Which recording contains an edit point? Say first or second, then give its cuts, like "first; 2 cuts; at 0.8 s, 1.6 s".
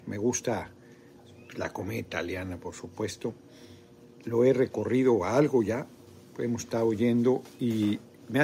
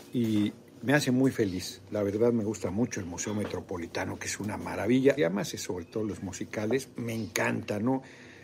second; 1 cut; at 5.2 s